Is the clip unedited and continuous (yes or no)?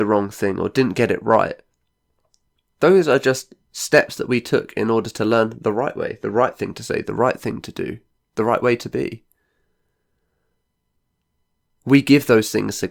yes